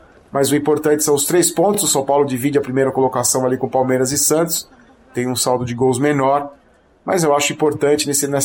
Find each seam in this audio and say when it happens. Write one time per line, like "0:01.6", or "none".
none